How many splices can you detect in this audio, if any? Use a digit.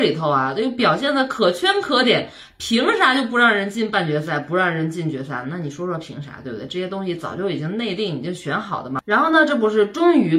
0